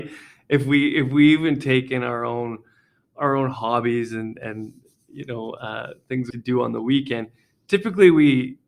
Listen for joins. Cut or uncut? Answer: cut